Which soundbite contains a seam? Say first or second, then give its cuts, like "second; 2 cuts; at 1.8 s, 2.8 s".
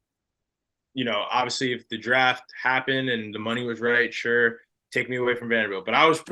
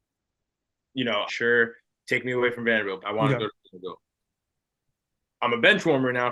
second; 2 cuts; at 1.3 s, 3.0 s